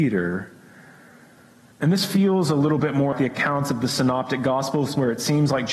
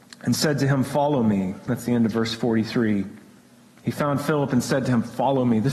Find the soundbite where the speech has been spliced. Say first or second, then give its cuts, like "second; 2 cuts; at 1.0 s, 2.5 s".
first; 1 cut; at 3.1 s